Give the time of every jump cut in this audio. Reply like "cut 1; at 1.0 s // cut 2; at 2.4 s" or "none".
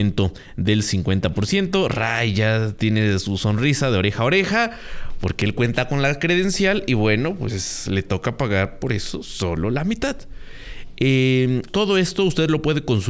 cut 1; at 11.7 s